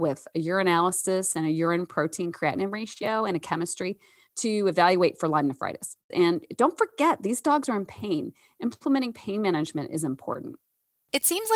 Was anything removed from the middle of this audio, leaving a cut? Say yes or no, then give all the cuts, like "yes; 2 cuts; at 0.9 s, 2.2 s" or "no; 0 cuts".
yes; 1 cut; at 6.1 s